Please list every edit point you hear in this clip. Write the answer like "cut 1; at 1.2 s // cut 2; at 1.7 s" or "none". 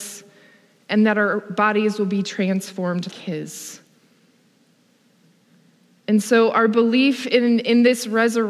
cut 1; at 3.1 s

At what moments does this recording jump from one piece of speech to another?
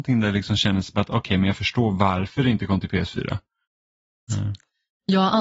cut 1; at 4.3 s

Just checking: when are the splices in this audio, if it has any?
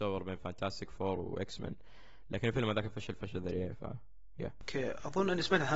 none

